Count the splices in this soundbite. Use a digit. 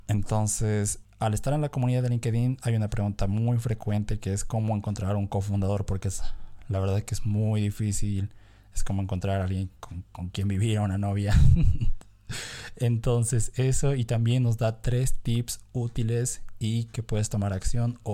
1